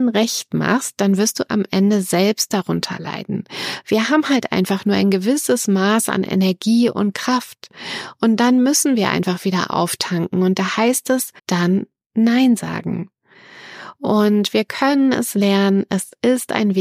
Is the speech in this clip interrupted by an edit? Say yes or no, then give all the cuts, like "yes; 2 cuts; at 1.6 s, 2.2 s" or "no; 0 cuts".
yes; 1 cut; at 11.4 s